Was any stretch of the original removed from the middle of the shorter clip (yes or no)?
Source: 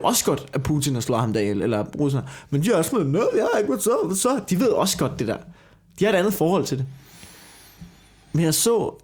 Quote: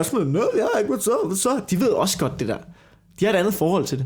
no